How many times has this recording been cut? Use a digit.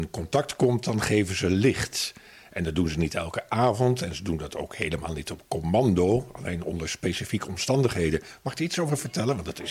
0